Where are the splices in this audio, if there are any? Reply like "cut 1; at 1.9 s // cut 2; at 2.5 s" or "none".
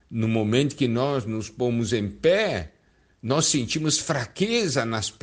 none